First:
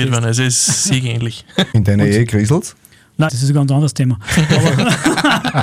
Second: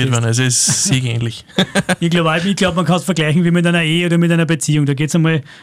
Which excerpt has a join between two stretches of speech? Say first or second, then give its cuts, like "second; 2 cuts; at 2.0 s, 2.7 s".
first; 2 cuts; at 1.7 s, 3.3 s